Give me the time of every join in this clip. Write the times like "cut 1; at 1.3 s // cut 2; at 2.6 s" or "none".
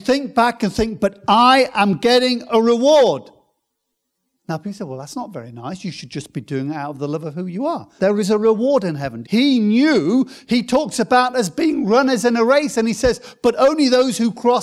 cut 1; at 8.0 s // cut 2; at 9.2 s